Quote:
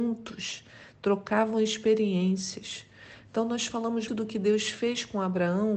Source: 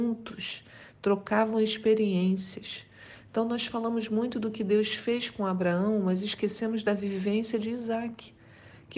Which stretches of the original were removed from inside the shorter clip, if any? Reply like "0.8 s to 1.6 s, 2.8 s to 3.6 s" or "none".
4.1 s to 4.3 s